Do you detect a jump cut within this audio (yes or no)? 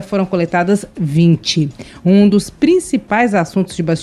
no